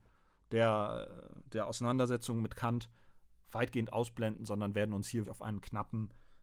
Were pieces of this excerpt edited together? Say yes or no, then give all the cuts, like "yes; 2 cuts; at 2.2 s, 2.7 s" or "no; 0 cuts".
yes; 1 cut; at 5.2 s